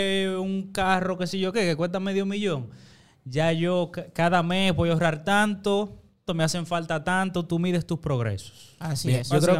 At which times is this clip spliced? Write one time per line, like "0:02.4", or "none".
0:06.3